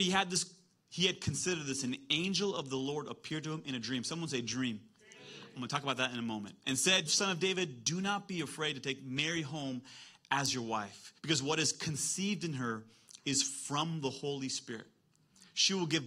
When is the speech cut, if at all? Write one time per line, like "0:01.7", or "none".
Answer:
0:07.1
0:11.2